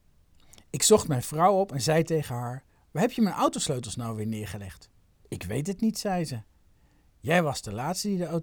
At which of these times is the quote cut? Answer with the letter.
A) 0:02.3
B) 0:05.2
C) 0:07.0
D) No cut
B